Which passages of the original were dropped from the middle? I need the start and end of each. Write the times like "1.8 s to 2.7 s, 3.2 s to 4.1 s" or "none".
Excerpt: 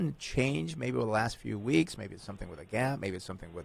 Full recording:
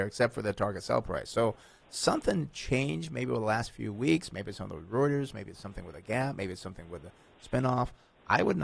4.3 s to 5.3 s